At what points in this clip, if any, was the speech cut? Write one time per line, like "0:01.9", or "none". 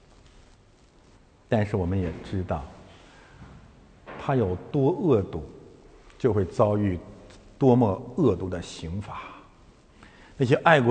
none